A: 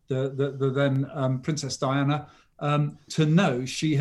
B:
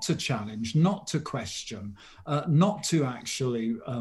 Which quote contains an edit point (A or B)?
A